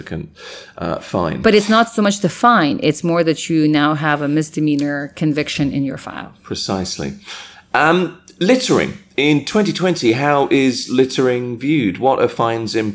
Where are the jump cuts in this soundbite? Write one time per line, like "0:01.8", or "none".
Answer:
none